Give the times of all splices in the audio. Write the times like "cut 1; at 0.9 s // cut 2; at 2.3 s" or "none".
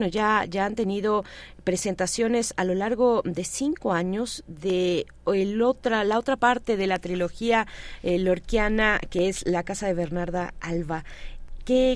none